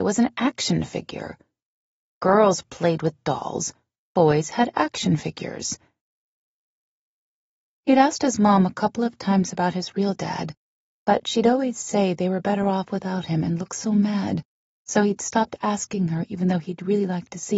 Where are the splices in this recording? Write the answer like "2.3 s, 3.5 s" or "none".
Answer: none